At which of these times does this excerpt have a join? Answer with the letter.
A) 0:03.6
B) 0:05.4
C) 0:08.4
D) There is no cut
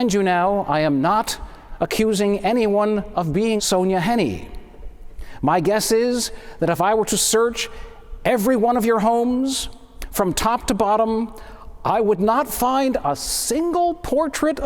A